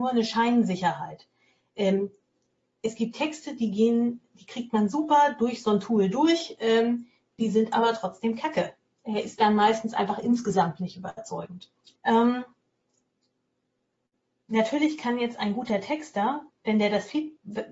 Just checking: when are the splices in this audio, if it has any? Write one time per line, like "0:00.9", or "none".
0:08.9
0:12.0
0:16.5